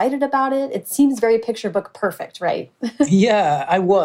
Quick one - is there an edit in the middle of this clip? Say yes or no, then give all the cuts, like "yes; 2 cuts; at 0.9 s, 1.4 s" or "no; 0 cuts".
no; 0 cuts